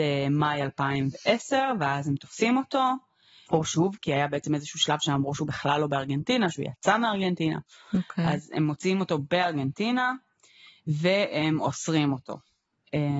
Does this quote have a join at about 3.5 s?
yes; 1 cut; at 3.5 s

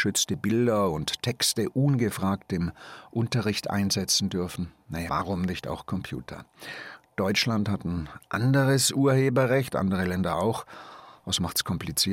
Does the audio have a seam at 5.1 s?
yes; 1 cut; at 5.1 s

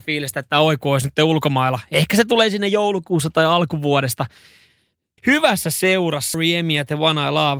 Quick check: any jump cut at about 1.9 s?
no; 2 cuts; at 5.2 s, 6.3 s

